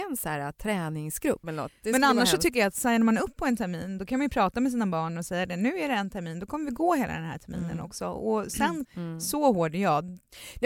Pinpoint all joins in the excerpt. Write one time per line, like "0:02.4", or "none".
0:01.4
0:08.8